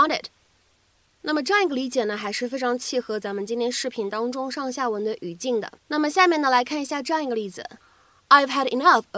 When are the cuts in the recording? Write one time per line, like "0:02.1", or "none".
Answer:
0:05.8